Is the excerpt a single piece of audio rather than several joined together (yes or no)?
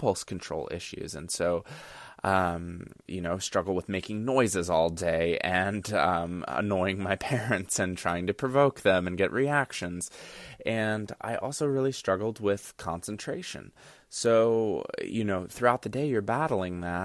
no